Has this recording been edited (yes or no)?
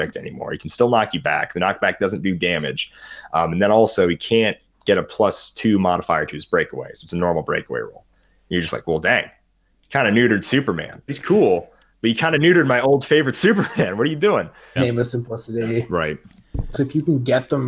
yes